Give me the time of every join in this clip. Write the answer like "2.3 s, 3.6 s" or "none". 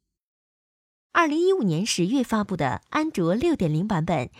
1.1 s